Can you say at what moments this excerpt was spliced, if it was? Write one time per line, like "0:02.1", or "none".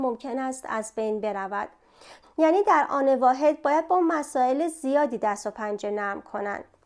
0:02.2